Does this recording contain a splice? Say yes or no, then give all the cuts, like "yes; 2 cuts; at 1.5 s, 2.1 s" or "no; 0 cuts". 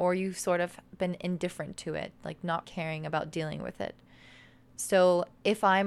yes; 1 cut; at 2.6 s